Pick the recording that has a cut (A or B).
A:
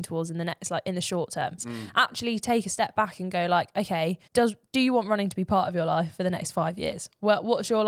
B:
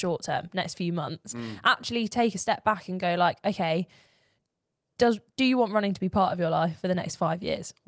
A